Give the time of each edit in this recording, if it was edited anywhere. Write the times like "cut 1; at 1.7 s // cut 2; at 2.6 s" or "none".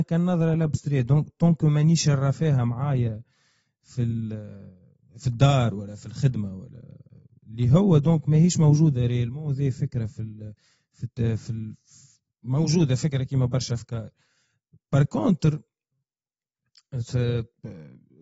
none